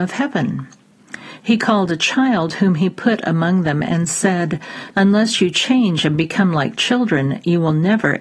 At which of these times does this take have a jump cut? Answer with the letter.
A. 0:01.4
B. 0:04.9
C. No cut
B